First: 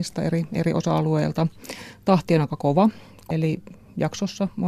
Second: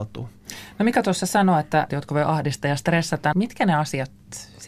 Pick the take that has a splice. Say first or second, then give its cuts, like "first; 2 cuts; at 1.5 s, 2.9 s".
second; 2 cuts; at 1.9 s, 3.3 s